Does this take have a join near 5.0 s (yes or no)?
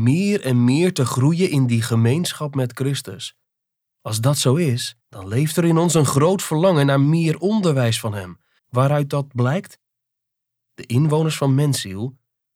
yes